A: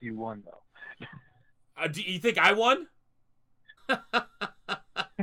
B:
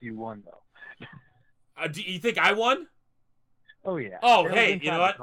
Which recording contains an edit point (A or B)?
A